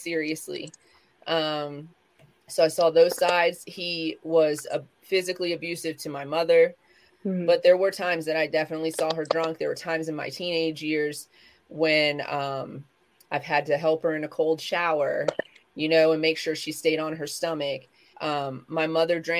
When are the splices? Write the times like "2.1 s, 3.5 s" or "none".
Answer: 7.1 s, 18.1 s